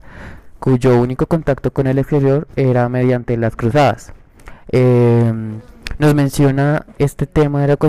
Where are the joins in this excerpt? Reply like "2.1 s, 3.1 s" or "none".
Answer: 4.6 s